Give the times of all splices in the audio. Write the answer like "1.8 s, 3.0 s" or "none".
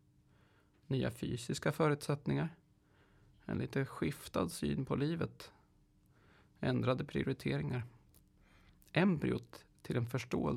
none